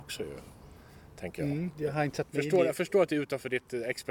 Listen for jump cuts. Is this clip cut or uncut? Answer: cut